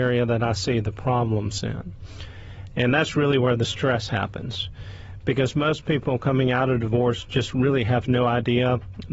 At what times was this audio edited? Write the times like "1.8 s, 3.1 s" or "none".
none

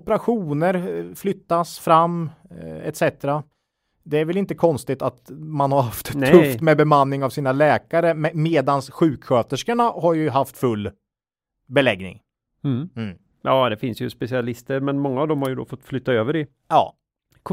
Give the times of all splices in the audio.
none

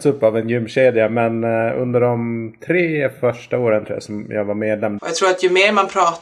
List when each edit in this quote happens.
5.0 s

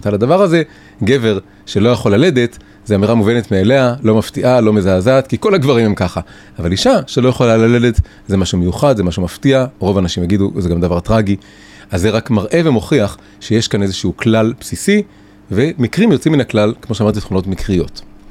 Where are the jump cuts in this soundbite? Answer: none

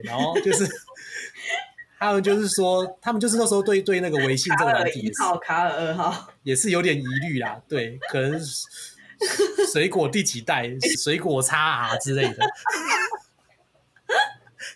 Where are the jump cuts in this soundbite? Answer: 10.9 s

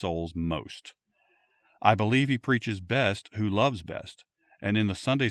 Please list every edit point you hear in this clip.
none

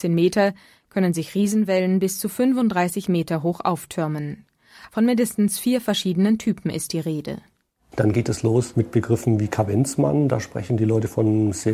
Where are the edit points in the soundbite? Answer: 4.9 s

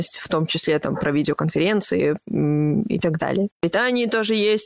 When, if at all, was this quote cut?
3.5 s

